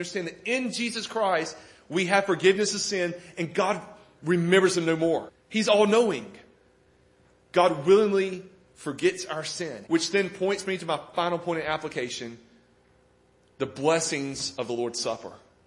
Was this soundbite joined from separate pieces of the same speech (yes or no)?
yes